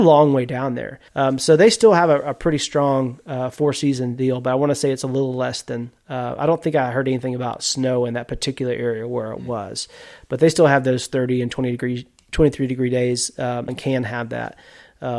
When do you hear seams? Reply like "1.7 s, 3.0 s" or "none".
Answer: 1.1 s, 13.7 s